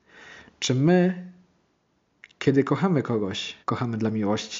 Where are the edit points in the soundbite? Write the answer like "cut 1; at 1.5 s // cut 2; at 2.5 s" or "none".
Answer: cut 1; at 3.6 s